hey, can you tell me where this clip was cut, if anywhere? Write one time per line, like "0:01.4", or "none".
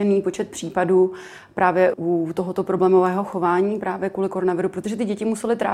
0:01.9